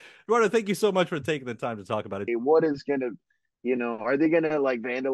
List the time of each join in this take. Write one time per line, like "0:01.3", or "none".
0:02.3